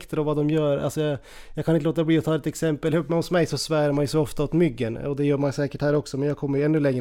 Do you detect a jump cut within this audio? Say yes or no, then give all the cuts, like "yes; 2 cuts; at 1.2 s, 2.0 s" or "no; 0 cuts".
no; 0 cuts